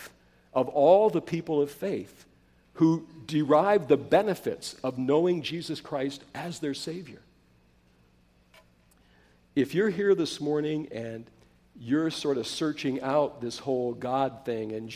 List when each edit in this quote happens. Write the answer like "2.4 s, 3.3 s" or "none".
9.3 s